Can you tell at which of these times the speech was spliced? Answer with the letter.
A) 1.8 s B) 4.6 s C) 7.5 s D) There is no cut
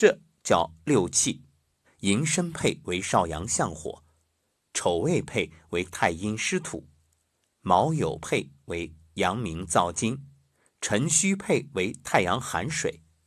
A